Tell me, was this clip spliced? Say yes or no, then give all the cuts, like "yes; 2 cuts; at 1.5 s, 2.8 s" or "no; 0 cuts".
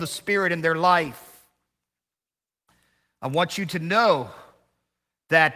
no; 0 cuts